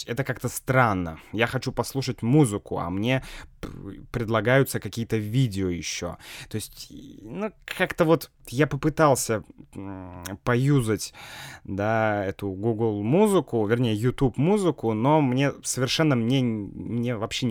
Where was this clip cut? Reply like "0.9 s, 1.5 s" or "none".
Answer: none